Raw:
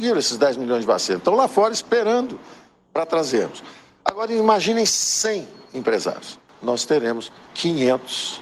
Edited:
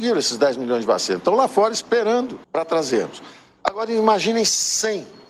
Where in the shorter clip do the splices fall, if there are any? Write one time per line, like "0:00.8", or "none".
0:02.4